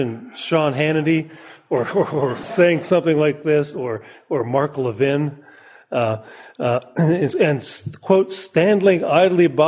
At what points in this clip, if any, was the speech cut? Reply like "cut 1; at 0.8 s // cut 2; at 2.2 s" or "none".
cut 1; at 2.4 s // cut 2; at 7.3 s

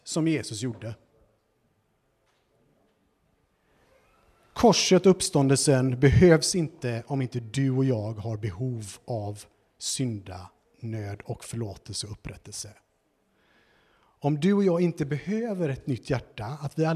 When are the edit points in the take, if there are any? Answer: none

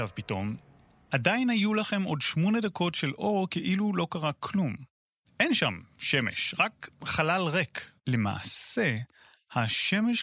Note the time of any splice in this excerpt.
cut 1; at 5.2 s // cut 2; at 8.0 s

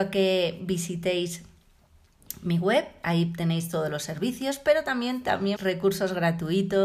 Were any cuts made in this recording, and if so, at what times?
cut 1; at 5.6 s

